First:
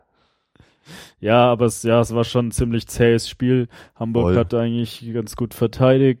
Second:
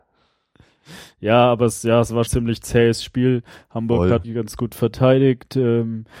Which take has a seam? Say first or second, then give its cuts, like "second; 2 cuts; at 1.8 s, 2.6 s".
second; 2 cuts; at 2.3 s, 4.2 s